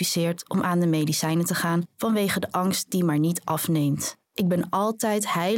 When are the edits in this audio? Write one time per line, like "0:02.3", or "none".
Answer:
0:04.2